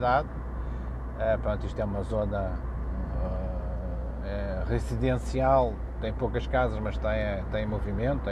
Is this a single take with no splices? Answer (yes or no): yes